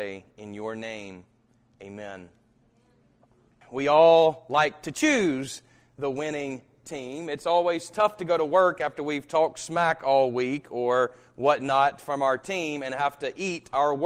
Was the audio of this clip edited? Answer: yes; 1 cut; at 3.6 s

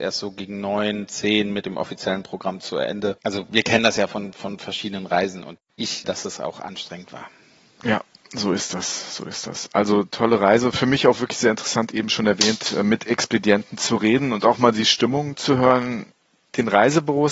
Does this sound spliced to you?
yes; 1 cut; at 6.0 s

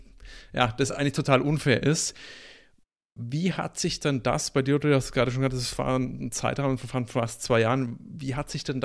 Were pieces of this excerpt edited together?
no; 0 cuts

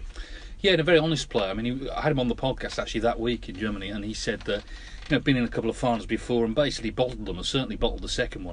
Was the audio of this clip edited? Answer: no; 0 cuts

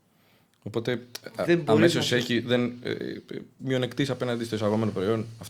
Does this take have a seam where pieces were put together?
no; 0 cuts

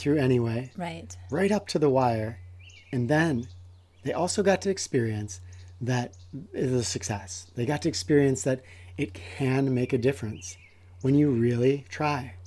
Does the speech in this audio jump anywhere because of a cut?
no; 0 cuts

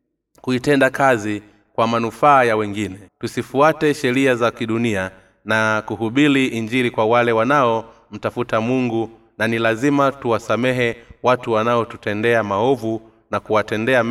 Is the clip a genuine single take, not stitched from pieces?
no; 1 cut; at 3.1 s

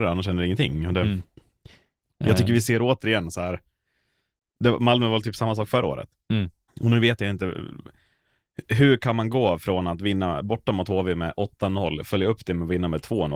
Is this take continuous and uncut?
no; 1 cut; at 6.7 s

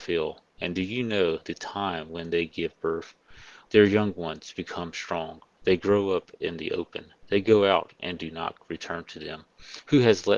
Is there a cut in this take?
yes; 1 cut; at 3.7 s

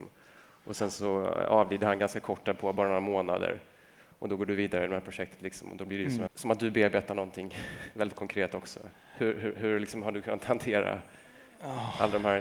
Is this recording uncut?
no; 1 cut; at 6.3 s

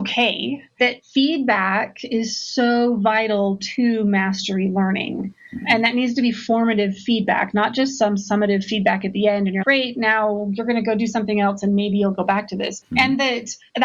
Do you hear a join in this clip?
yes; 2 cuts; at 9.6 s, 12.8 s

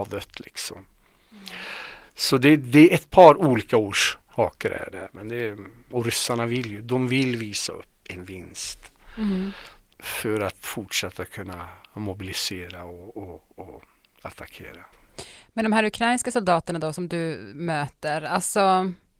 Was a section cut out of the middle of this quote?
no; 0 cuts

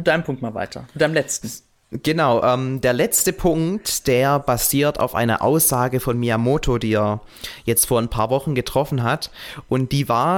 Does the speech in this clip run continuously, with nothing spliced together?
yes; 0 cuts

